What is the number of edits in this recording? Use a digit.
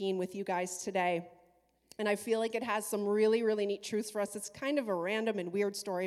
0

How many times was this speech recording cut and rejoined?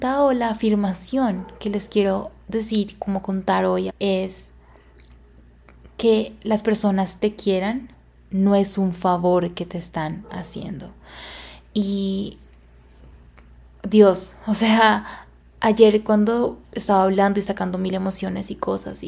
2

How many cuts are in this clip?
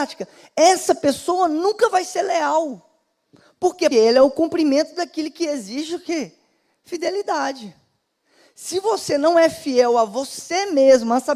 1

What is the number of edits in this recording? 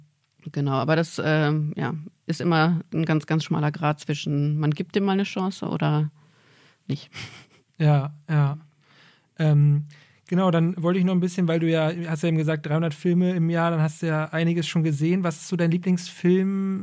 0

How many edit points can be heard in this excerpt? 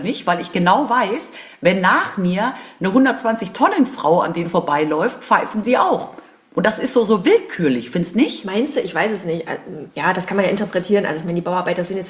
1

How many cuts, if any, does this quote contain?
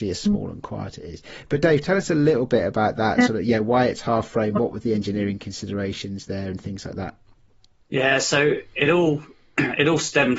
0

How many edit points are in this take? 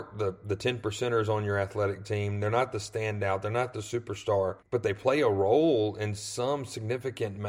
1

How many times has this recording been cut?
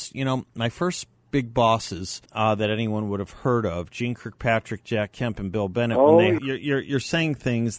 2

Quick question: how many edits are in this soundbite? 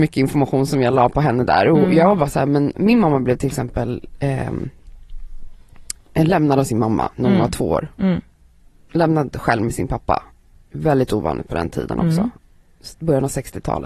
0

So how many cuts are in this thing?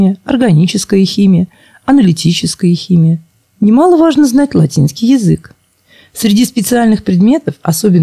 0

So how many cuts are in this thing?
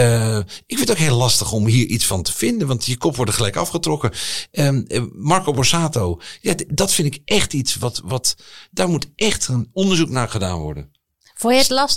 0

